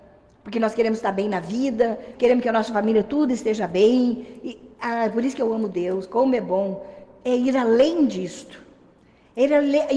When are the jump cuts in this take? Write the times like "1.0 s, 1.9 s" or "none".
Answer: 2.1 s